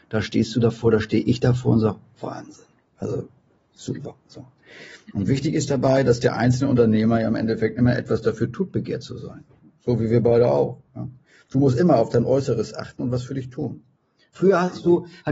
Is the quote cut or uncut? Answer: uncut